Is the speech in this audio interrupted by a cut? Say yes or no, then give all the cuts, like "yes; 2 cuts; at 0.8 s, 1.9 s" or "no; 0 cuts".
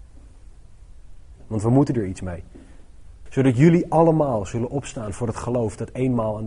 yes; 2 cuts; at 1.4 s, 3.3 s